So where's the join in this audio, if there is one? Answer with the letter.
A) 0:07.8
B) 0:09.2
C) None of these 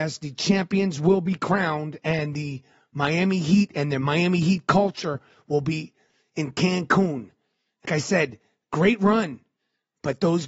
A